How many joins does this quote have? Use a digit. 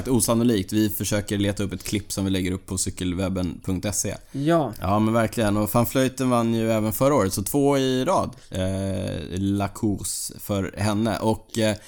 1